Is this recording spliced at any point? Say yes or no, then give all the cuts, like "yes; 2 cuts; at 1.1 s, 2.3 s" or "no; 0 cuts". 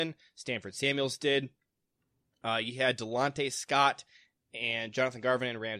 no; 0 cuts